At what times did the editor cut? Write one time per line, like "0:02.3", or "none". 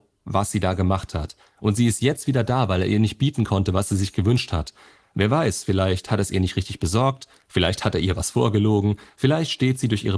none